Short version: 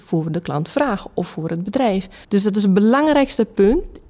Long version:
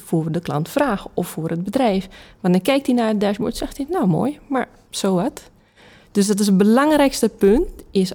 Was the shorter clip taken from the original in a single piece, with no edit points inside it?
no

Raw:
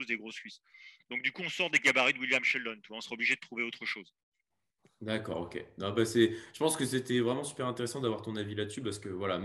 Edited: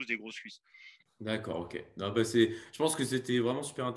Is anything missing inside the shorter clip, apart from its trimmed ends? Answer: yes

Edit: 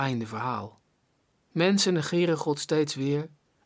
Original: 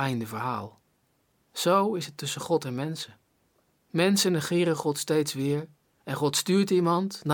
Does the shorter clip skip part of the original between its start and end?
yes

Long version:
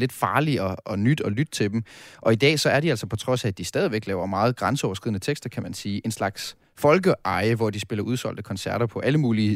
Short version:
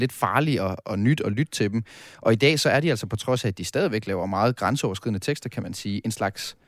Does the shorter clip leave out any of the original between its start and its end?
no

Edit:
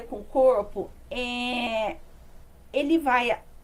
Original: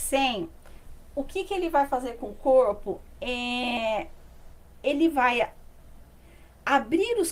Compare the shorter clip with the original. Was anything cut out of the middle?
no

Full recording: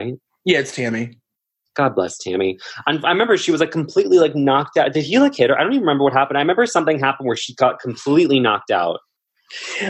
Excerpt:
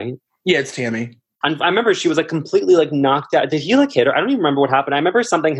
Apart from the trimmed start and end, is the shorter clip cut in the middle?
yes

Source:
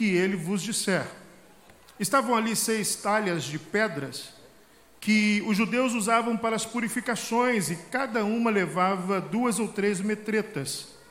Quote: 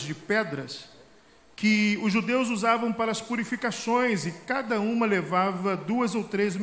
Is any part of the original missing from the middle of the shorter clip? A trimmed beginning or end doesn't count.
no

